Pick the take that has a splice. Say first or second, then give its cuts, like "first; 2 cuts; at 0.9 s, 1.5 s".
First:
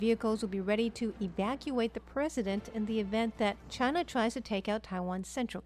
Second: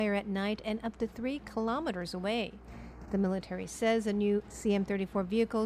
second; 1 cut; at 3.0 s